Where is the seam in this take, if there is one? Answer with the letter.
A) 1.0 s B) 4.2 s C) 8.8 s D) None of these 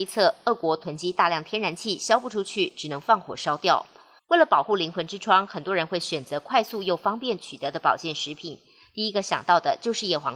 B